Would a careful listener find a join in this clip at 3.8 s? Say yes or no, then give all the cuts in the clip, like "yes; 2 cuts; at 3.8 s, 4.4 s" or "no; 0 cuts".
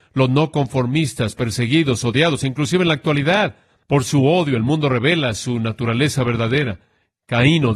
yes; 1 cut; at 3.8 s